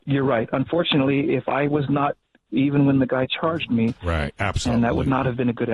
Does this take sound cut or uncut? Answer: cut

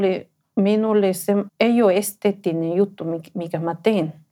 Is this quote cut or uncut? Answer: cut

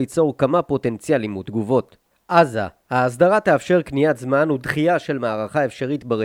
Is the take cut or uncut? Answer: uncut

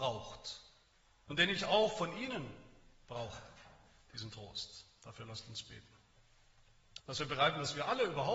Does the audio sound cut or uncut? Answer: cut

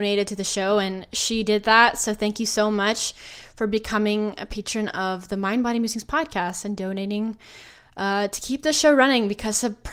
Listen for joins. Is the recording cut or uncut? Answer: uncut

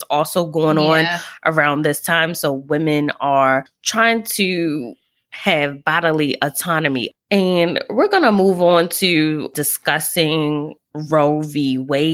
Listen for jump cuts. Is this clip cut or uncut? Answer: uncut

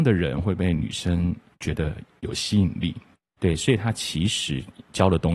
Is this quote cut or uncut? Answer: cut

